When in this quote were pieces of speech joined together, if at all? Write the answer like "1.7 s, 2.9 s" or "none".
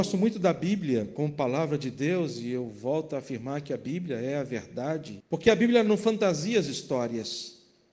5.2 s